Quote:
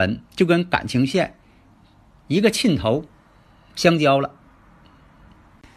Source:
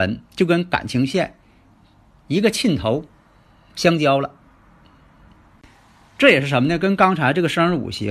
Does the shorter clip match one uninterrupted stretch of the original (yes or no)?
yes